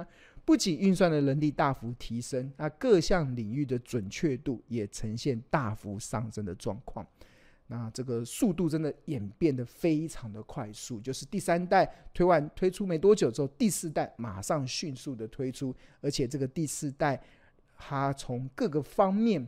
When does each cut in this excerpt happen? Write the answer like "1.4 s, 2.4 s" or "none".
none